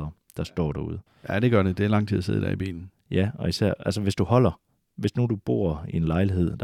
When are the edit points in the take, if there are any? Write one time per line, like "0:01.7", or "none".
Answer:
0:01.1